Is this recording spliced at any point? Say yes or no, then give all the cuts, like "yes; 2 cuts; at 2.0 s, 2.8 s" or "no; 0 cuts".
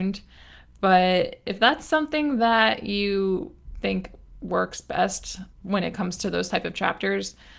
yes; 1 cut; at 5.5 s